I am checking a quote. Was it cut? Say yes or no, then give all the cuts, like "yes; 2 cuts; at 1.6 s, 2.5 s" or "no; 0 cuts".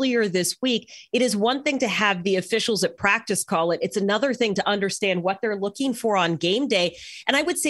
no; 0 cuts